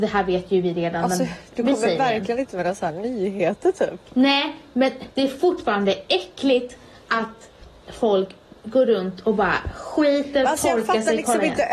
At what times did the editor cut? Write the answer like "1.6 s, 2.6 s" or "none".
4.1 s, 5.1 s